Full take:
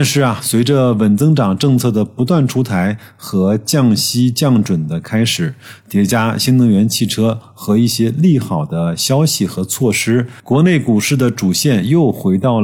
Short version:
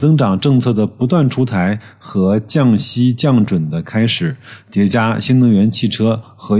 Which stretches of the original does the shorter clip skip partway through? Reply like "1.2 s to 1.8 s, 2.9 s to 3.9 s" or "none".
none